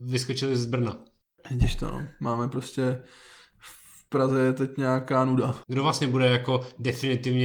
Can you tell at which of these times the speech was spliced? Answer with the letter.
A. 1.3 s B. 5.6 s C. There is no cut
B